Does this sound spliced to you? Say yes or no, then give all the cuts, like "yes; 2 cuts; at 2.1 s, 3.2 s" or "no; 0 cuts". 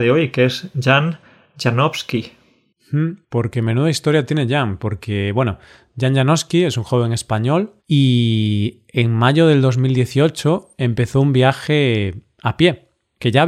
yes; 1 cut; at 7.8 s